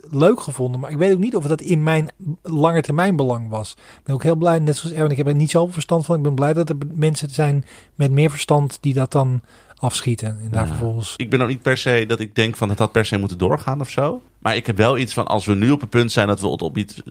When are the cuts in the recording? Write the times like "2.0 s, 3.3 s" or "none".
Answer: 11.2 s, 14.3 s

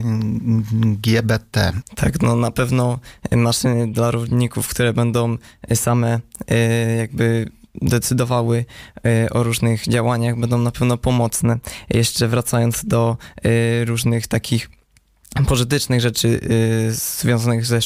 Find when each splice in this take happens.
1.8 s

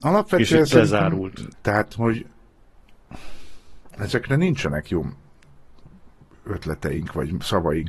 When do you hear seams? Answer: 1.5 s

